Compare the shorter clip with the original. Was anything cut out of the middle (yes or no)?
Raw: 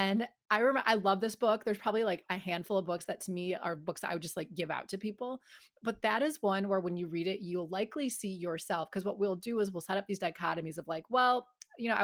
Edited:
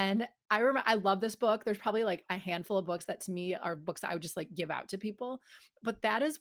no